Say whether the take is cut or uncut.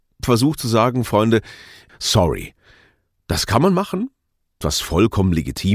cut